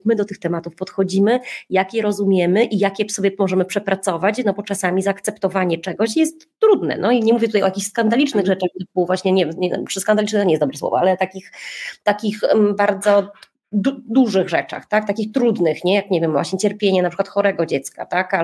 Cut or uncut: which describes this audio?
uncut